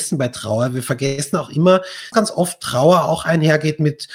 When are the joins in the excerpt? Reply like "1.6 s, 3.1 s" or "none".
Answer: 2.1 s